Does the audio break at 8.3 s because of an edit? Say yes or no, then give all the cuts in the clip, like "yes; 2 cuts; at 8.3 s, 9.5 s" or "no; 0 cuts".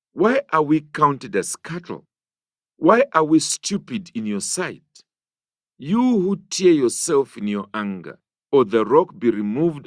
yes; 1 cut; at 8.3 s